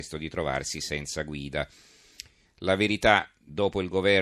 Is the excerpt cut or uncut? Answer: cut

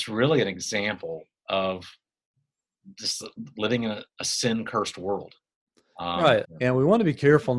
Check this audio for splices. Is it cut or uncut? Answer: cut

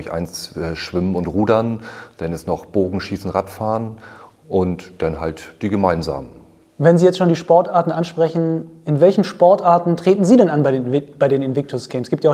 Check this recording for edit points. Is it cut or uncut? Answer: uncut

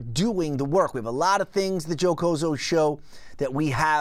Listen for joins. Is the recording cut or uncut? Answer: uncut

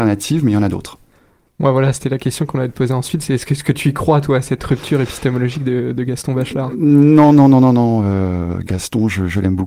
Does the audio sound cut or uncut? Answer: uncut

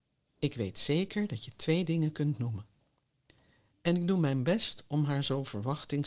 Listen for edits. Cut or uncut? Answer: uncut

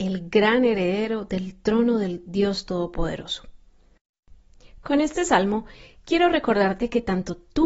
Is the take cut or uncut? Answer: uncut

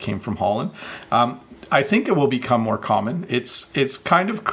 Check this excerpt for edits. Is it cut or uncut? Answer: cut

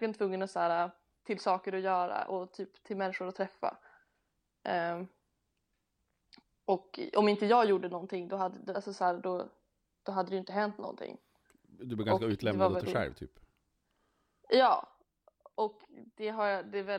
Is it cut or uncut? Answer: cut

